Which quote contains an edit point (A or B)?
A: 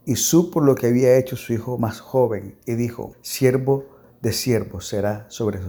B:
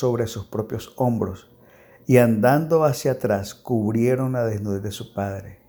A